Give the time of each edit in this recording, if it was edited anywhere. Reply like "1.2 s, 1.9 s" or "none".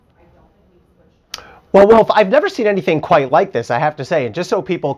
none